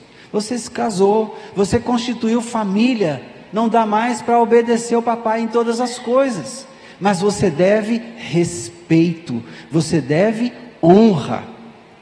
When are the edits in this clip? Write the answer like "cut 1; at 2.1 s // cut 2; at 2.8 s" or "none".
none